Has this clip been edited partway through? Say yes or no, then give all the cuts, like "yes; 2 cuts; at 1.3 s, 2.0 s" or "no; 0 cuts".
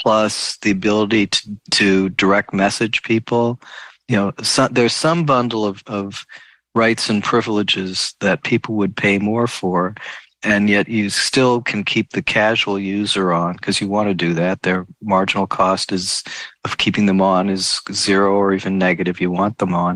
no; 0 cuts